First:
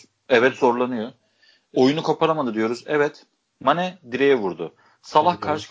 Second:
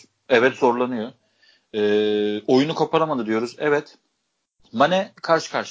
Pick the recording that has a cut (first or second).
first